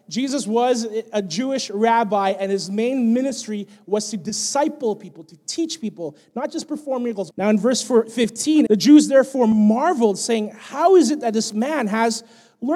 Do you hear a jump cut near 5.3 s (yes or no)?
no